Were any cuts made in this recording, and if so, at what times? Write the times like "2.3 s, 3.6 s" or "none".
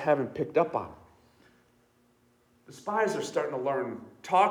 none